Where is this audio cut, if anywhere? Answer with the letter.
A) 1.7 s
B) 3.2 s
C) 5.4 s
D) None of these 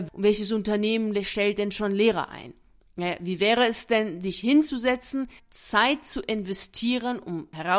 C